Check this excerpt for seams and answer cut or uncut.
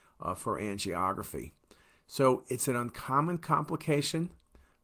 uncut